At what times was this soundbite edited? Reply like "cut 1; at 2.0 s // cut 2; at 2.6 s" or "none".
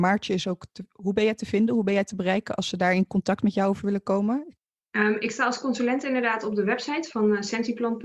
none